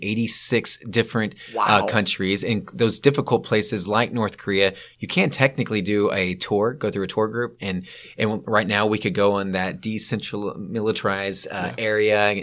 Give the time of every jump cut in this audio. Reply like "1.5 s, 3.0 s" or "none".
none